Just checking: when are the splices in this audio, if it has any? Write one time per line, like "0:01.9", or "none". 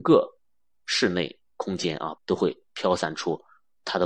0:02.2